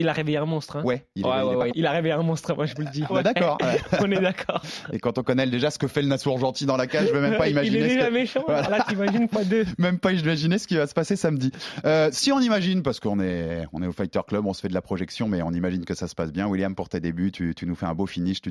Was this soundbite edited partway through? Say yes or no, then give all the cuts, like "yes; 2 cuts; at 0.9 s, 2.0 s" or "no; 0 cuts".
yes; 2 cuts; at 1.7 s, 3.1 s